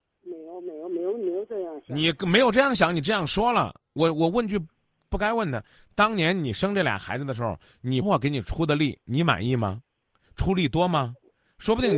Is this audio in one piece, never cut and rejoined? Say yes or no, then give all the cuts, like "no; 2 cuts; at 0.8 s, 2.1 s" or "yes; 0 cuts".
no; 1 cut; at 8.0 s